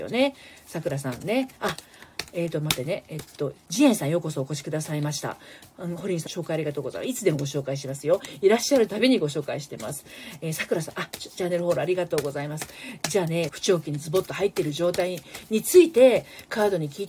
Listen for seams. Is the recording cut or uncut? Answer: cut